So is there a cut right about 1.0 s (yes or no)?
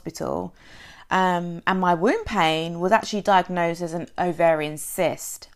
no